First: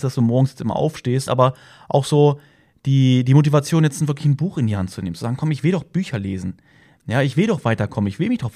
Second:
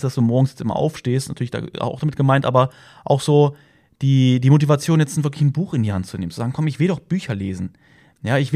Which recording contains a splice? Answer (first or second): first